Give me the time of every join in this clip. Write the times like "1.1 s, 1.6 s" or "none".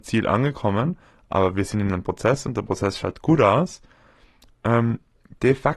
none

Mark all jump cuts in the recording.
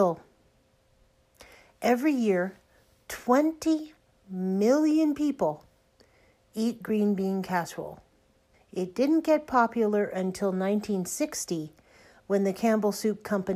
8.5 s

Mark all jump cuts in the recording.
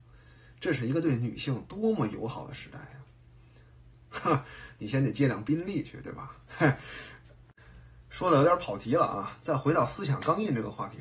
4.1 s, 6.5 s

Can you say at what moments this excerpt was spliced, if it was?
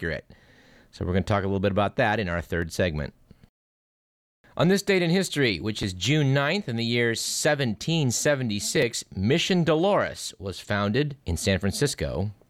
11.2 s

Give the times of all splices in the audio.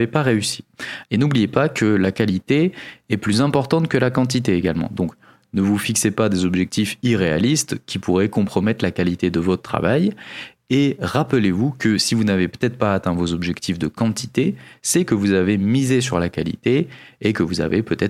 1.0 s

